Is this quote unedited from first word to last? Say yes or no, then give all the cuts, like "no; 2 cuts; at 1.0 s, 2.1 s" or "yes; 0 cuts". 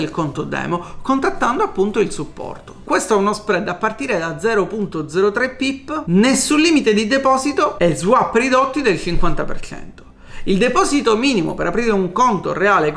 no; 1 cut; at 2.8 s